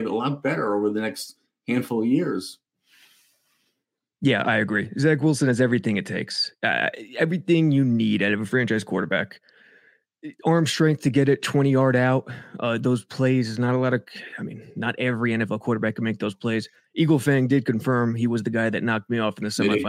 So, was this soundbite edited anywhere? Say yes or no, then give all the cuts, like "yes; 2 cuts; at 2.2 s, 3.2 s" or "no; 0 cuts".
no; 0 cuts